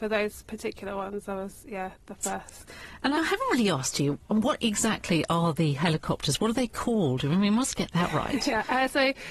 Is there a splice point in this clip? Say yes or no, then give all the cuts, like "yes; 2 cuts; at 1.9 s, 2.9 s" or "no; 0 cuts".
yes; 1 cut; at 3.2 s